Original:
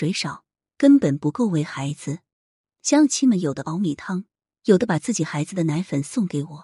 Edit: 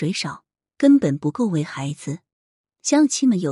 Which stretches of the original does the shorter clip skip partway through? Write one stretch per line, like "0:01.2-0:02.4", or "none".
none